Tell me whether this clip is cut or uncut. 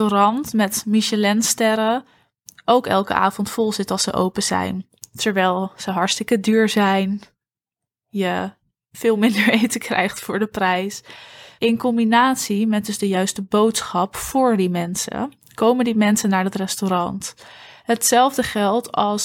cut